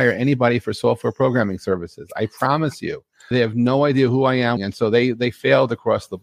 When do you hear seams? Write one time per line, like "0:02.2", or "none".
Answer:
0:03.3
0:04.6